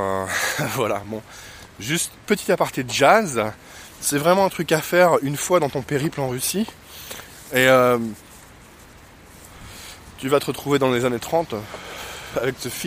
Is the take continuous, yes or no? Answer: yes